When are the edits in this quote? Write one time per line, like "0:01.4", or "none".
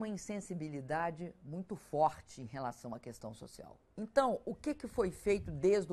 none